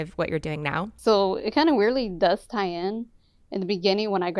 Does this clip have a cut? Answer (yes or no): no